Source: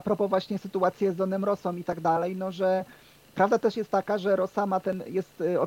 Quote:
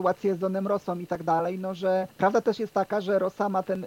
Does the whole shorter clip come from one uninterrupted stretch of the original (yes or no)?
no